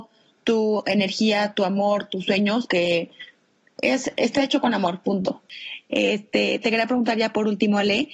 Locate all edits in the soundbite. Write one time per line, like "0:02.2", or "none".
0:02.7